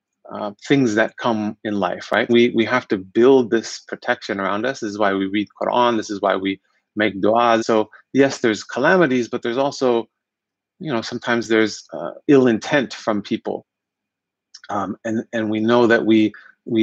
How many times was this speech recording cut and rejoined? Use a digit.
2